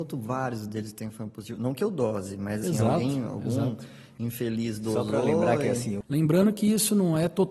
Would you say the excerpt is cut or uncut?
cut